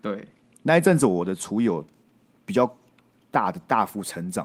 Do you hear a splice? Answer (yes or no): no